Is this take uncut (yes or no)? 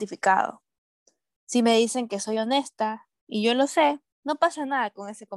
no